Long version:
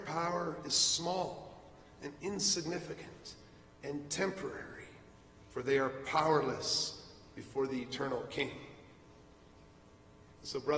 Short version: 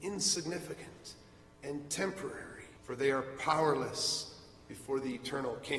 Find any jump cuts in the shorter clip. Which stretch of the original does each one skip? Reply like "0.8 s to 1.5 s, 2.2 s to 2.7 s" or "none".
5.0 s to 5.4 s